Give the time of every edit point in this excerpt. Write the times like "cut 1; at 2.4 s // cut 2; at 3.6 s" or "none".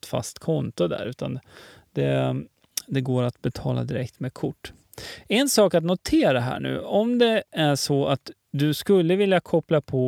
none